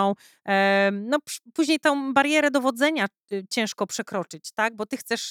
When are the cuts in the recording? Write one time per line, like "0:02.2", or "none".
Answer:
none